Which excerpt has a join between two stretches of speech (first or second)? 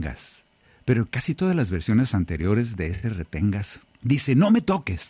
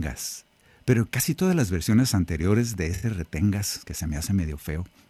first